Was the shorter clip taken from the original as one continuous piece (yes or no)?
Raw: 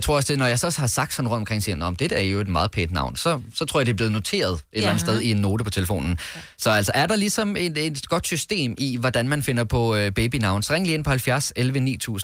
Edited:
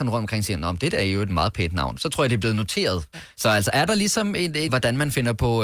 no